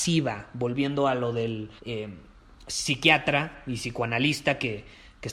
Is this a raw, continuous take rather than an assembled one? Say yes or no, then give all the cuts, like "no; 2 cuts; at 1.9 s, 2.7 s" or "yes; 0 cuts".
no; 1 cut; at 1.8 s